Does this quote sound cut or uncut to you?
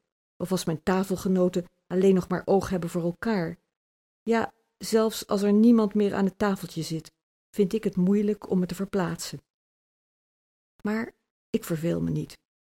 uncut